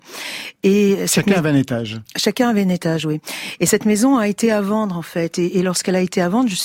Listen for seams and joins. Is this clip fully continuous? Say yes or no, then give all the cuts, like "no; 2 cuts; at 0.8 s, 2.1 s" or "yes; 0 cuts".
yes; 0 cuts